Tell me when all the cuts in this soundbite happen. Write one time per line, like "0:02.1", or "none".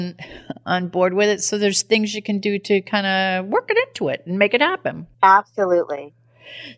0:05.1